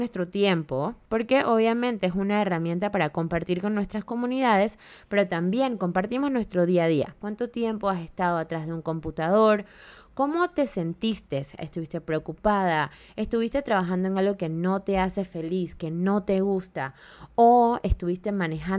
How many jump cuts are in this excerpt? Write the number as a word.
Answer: two